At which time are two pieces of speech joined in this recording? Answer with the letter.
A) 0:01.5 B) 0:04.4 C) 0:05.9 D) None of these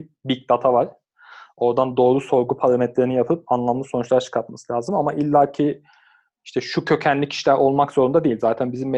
D